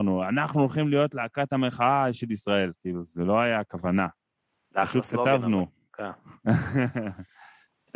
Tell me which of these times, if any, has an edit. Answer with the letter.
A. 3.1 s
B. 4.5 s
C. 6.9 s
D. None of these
A